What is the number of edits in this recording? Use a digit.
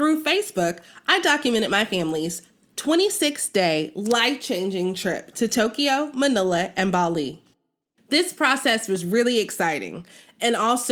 1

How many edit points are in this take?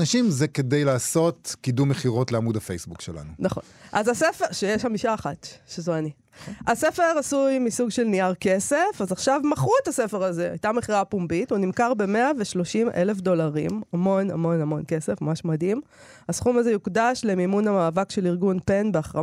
0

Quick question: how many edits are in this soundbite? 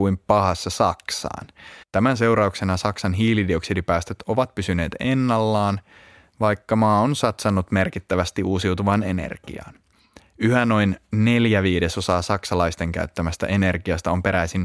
1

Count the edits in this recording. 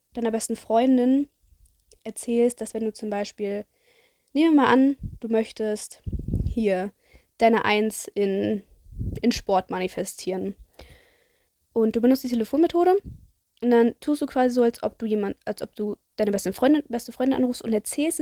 0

